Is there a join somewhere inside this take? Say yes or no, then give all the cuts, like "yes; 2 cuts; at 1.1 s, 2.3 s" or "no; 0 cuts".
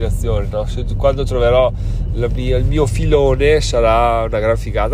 no; 0 cuts